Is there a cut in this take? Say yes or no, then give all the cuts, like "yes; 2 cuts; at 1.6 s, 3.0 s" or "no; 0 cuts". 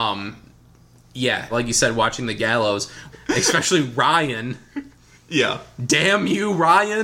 yes; 2 cuts; at 1.5 s, 3.1 s